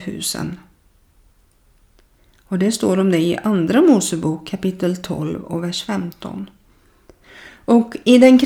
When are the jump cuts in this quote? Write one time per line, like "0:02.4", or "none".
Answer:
none